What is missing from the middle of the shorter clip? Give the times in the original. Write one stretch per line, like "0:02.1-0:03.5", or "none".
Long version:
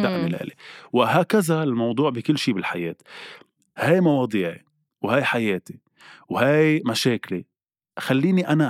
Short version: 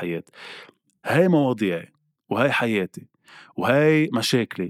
none